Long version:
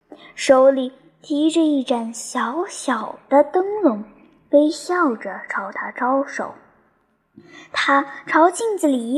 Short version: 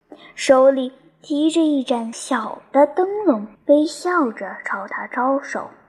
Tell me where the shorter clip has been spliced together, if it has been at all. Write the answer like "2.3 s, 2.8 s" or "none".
2.1 s, 3.5 s